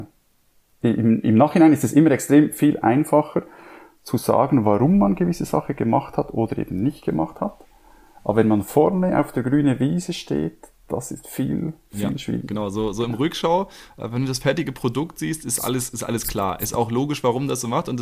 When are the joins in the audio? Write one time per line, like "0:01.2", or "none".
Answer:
none

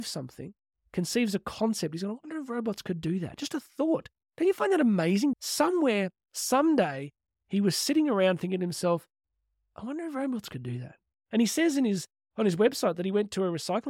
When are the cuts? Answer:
0:05.3

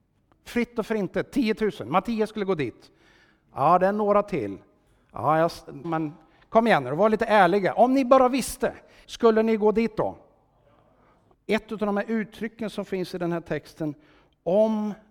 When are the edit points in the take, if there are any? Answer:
0:05.8
0:09.0
0:11.3

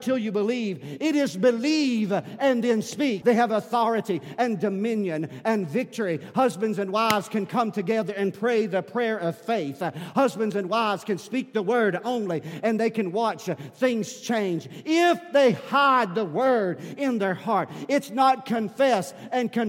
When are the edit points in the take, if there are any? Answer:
0:03.2

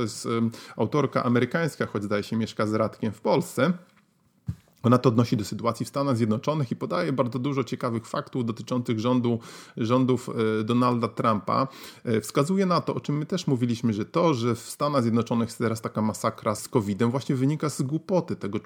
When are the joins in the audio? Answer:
0:16.6

